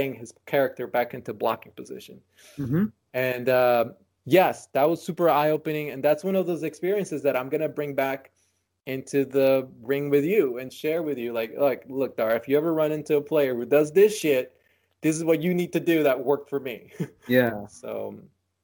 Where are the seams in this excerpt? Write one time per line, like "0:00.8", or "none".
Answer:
none